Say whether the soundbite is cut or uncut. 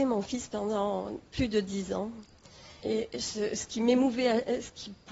cut